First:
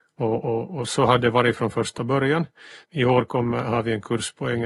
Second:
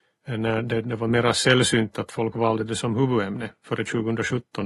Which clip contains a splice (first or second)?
first